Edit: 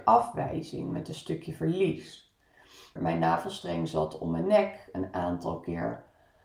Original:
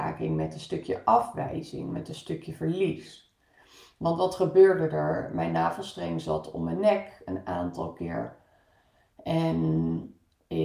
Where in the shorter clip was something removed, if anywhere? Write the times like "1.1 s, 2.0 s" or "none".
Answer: 3.0 s